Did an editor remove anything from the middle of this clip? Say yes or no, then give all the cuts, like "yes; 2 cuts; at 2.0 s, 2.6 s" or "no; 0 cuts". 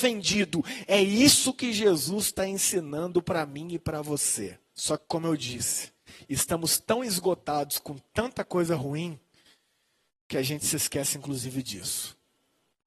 yes; 1 cut; at 4.7 s